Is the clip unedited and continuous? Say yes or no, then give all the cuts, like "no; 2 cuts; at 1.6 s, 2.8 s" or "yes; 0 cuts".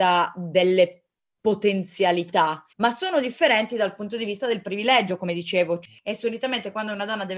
no; 1 cut; at 2.7 s